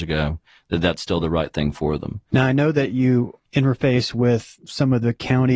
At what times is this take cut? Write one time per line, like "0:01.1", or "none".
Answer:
0:02.3
0:03.4